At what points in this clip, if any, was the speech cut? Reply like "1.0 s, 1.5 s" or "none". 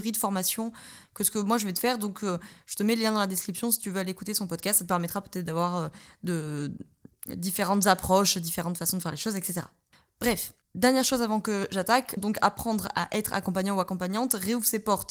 10.6 s, 12.2 s